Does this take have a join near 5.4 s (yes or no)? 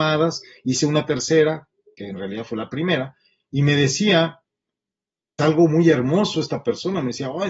yes